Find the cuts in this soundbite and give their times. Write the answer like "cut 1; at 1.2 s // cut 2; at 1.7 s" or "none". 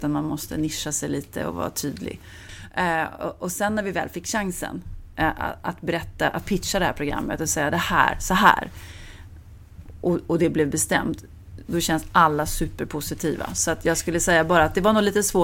none